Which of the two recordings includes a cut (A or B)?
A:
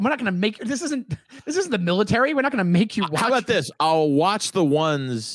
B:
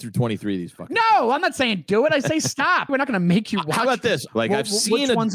B